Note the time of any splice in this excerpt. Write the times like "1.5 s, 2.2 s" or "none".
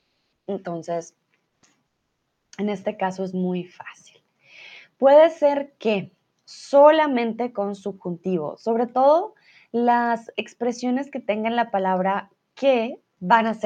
none